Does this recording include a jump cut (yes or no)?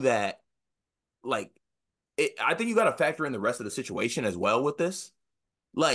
no